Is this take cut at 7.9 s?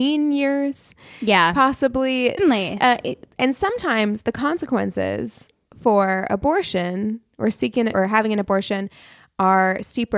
yes; 2 cuts; at 2.4 s, 7.9 s

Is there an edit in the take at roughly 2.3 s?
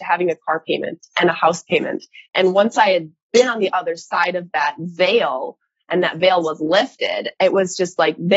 yes; 1 cut; at 2.3 s

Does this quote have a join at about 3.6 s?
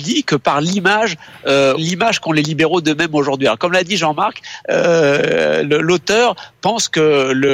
no; 1 cut; at 1.8 s

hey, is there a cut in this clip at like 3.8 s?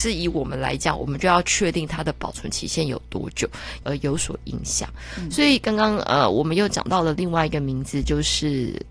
yes; 1 cut; at 3.8 s

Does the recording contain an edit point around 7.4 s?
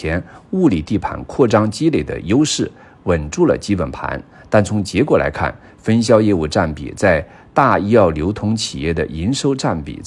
no; 0 cuts

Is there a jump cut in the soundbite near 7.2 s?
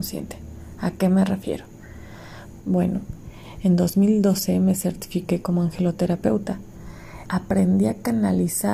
yes; 2 cuts; at 2.6 s, 7.2 s

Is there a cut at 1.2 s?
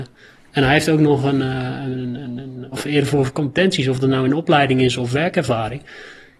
no; 1 cut; at 2.7 s

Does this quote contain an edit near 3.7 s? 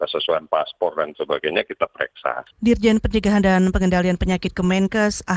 no; 1 cut; at 2.5 s

